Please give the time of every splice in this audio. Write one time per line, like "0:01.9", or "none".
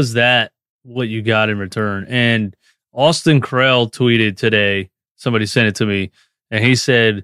none